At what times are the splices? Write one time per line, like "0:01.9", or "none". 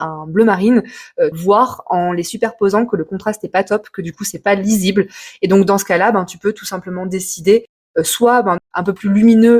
0:01.3
0:08.6